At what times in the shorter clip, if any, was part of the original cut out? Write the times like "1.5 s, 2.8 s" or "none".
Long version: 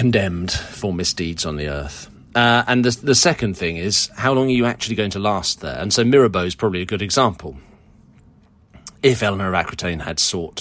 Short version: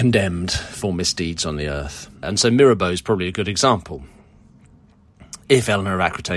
2.2 s

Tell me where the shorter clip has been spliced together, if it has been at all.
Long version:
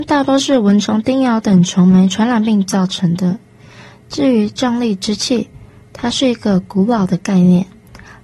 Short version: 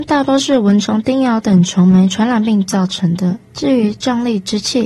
3.4 s

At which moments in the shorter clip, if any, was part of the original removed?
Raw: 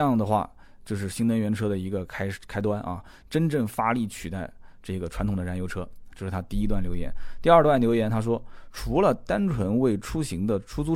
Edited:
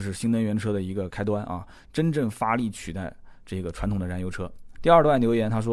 1.1 s, 4.8 s

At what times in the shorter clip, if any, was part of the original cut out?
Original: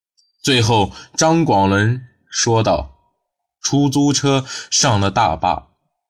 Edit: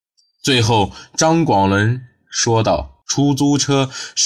3.0 s

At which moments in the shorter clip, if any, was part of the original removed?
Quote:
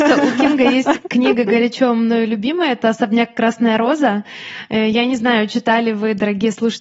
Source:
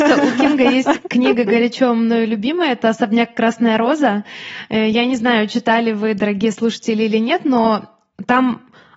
none

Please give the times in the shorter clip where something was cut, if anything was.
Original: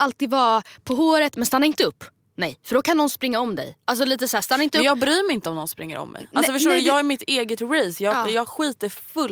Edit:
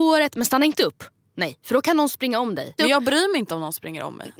2.8 s

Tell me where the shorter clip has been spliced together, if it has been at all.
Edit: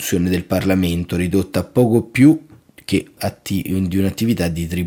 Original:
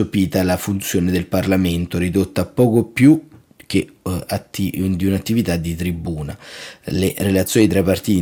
3.2 s

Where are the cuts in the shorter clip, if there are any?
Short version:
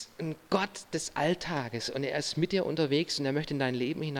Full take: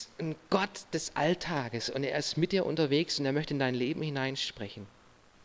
none

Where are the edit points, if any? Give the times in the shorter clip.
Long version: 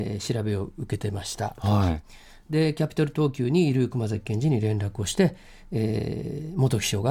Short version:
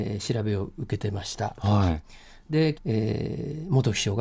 2.7 s

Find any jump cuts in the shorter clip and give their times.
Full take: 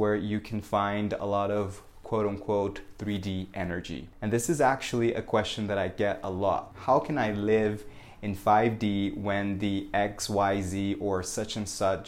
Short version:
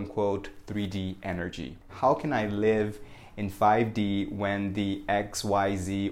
1.9 s

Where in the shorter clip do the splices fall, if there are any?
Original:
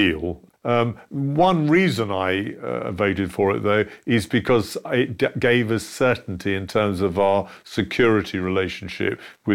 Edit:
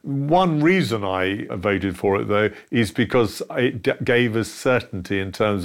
1.5 s

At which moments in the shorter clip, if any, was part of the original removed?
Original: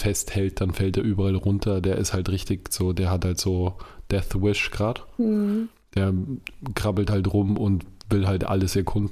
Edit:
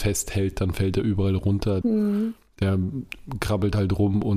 1.8 s

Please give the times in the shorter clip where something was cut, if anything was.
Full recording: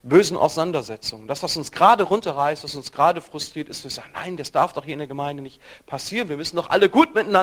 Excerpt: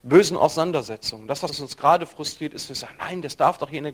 1.5 s

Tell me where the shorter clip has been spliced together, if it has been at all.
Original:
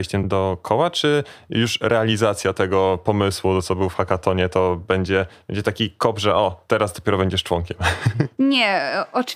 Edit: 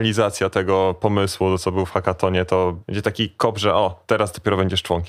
2.8 s

